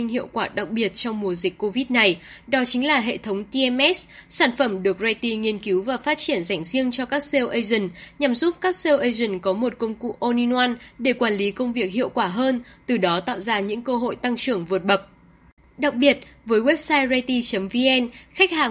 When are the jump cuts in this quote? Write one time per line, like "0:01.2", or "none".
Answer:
0:15.6